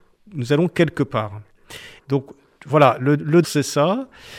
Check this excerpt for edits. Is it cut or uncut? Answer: cut